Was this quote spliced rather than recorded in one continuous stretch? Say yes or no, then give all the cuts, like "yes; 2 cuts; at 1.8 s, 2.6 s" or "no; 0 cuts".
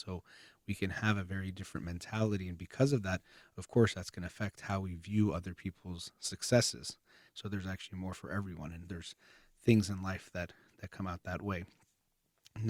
yes; 1 cut; at 7.3 s